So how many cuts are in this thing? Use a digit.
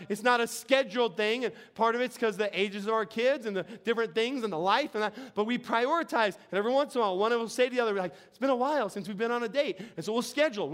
0